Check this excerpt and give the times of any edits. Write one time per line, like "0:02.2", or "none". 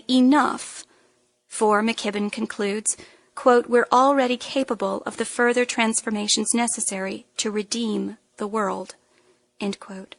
none